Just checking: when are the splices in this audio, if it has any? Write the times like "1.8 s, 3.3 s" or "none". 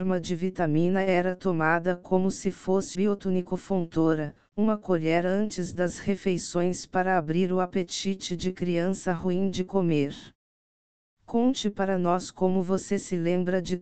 2.9 s